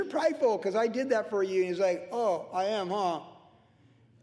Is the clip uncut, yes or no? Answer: yes